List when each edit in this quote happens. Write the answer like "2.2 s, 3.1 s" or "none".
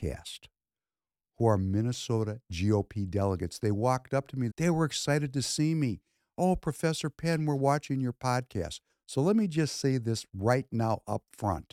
4.5 s